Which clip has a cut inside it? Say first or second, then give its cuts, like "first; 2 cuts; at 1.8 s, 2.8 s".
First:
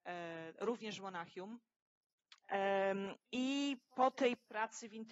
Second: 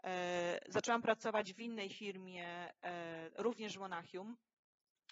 first; 1 cut; at 2.4 s